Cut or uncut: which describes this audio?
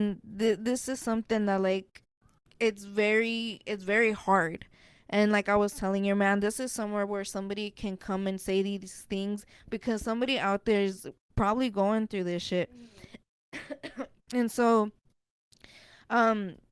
uncut